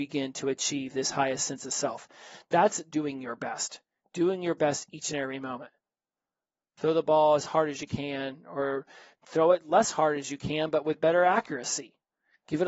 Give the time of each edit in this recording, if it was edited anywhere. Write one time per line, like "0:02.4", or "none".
none